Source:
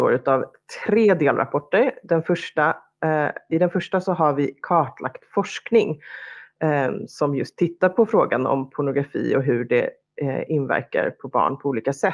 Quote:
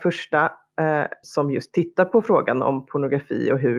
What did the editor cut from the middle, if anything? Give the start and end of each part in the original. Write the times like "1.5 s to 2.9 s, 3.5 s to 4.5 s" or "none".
3.5 s to 7.1 s